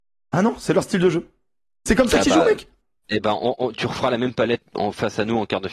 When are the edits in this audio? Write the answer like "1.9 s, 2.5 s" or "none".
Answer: 4.6 s

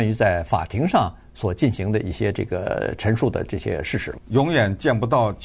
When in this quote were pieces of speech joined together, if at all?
4.2 s

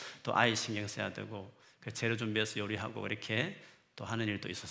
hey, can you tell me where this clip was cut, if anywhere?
none

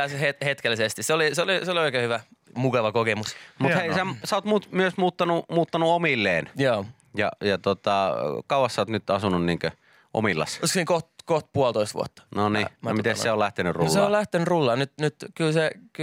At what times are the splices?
none

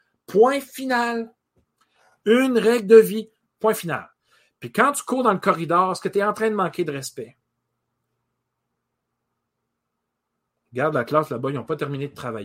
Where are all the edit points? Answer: 3.5 s

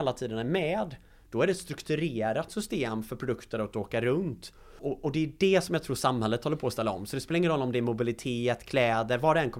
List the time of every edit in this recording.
none

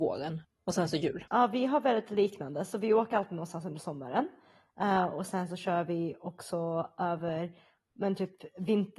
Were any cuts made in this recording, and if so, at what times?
none

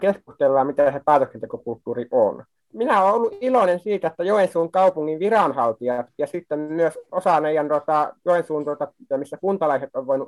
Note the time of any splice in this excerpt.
9.1 s

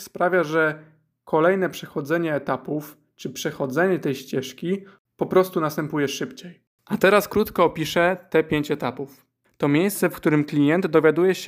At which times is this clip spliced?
9.4 s

